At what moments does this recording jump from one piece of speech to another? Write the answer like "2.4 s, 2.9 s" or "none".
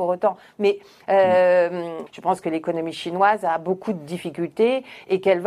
2.1 s